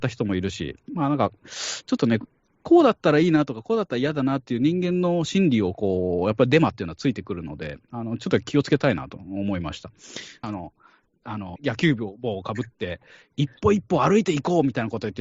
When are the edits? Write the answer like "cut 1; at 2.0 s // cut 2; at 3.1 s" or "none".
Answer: cut 1; at 10.4 s // cut 2; at 11.6 s